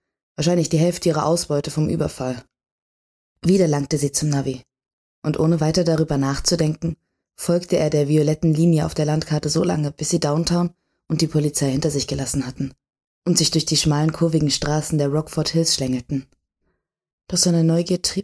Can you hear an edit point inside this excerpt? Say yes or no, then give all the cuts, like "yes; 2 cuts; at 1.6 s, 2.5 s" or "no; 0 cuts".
yes; 1 cut; at 17.1 s